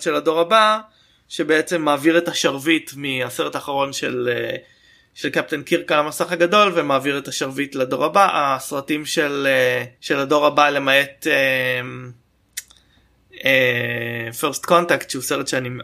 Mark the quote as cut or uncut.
cut